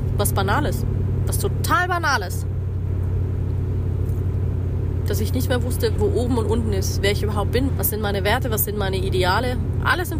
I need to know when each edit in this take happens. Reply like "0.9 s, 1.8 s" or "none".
6.0 s, 7.7 s